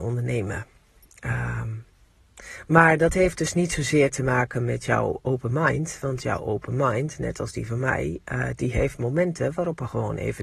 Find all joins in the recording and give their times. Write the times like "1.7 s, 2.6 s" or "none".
none